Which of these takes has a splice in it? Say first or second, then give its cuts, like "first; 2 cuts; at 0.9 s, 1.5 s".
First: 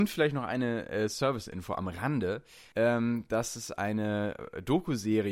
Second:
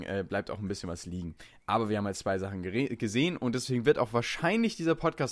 first; 1 cut; at 2.7 s